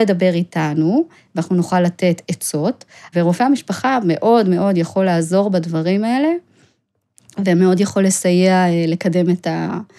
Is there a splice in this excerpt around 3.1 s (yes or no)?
yes